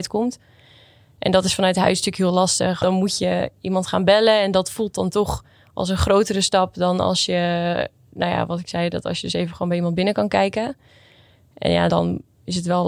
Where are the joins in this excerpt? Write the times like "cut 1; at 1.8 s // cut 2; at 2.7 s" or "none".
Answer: cut 1; at 2.8 s // cut 2; at 11.9 s